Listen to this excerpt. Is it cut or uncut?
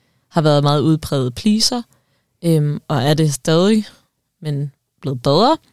uncut